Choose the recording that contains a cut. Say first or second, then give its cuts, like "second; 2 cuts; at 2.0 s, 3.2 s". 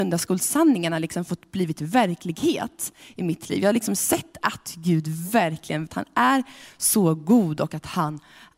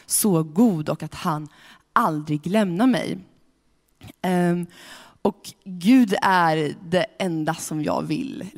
first; 1 cut; at 5.9 s